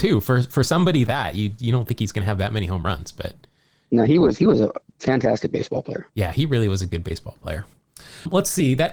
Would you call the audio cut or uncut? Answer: cut